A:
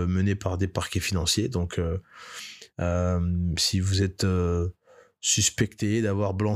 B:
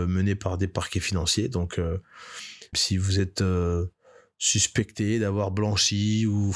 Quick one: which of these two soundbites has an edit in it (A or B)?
B